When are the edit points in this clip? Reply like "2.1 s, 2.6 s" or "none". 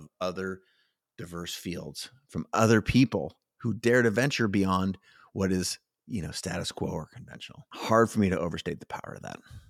none